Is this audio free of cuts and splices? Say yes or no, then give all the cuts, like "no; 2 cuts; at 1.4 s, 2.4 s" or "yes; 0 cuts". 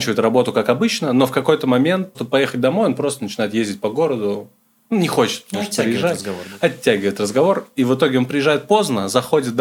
no; 1 cut; at 2.1 s